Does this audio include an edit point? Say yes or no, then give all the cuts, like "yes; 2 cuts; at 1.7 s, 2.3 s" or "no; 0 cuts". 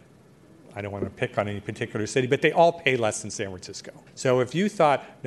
yes; 1 cut; at 4.1 s